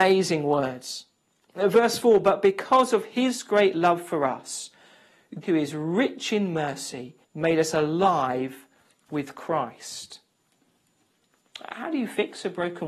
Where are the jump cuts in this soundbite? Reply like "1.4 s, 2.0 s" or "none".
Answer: 5.4 s, 7.2 s